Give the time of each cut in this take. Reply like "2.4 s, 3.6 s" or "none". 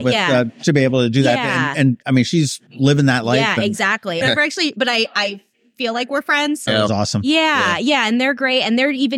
2.7 s, 4.2 s, 6.7 s